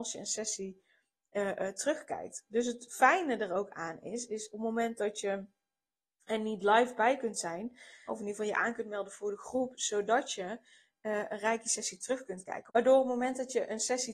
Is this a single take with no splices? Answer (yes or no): no